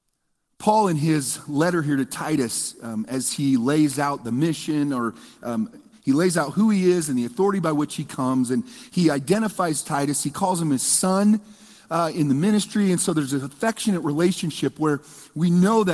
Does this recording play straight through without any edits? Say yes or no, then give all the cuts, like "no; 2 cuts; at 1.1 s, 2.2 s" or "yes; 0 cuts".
yes; 0 cuts